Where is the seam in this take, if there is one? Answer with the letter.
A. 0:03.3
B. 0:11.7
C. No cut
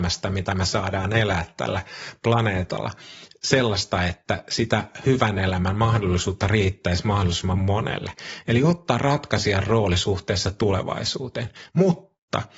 B